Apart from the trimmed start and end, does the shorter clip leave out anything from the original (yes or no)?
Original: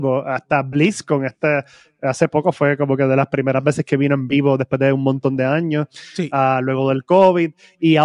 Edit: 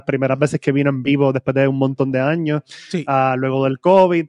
no